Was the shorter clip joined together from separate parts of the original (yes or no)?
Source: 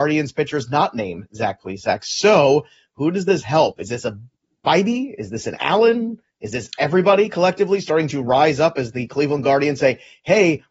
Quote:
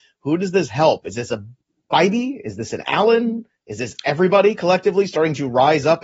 no